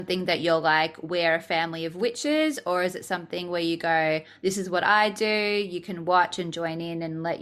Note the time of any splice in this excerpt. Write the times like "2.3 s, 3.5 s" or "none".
none